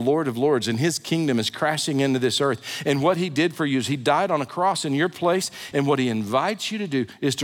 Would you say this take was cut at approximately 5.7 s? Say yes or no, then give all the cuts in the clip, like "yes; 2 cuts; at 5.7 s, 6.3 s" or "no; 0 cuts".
yes; 1 cut; at 5.7 s